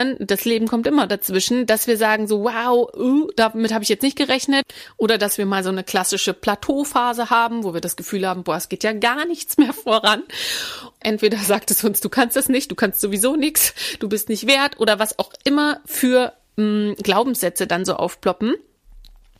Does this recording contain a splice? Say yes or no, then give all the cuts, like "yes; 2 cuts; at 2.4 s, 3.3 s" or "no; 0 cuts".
yes; 1 cut; at 11.0 s